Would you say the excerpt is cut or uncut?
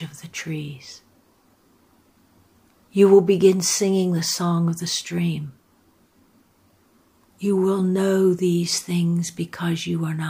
cut